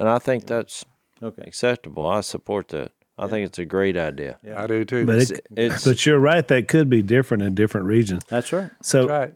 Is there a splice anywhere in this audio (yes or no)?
no